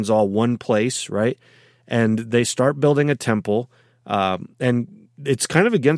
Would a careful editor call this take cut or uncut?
uncut